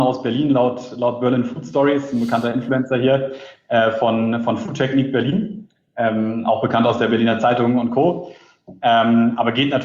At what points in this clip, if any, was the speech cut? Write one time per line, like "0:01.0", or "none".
none